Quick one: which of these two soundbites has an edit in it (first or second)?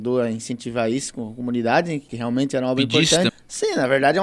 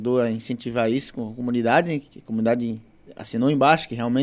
first